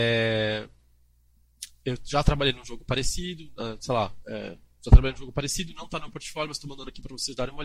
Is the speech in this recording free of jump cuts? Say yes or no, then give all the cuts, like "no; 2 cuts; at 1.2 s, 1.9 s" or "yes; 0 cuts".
no; 1 cut; at 4.2 s